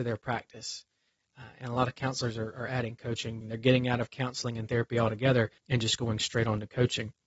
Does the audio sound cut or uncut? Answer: cut